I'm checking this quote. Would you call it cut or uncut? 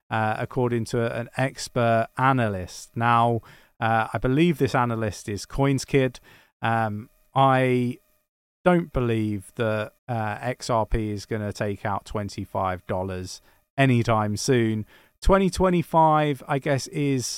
cut